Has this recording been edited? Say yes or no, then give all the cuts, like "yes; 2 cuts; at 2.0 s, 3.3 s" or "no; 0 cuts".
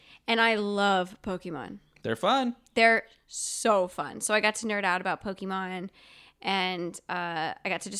no; 0 cuts